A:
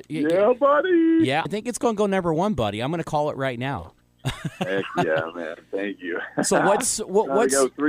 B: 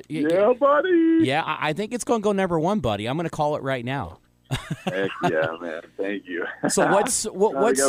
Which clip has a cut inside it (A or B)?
A